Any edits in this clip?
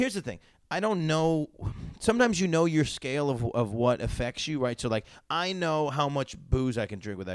no; 0 cuts

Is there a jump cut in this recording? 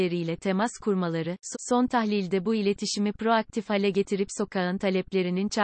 yes; 1 cut; at 1.5 s

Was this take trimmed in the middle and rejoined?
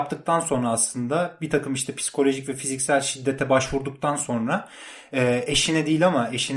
no; 0 cuts

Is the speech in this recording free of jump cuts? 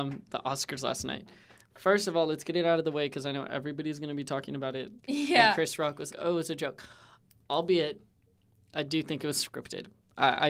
no; 2 cuts; at 5.0 s, 6.1 s

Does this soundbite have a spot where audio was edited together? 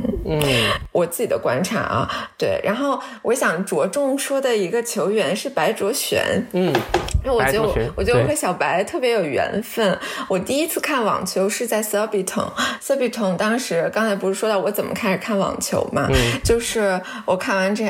no; 0 cuts

